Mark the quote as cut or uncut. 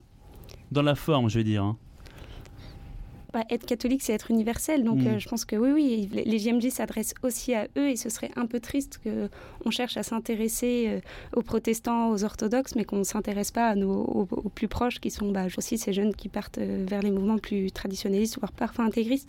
uncut